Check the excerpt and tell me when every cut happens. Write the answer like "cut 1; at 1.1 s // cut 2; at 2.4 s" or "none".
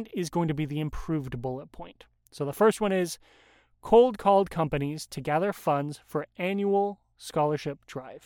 none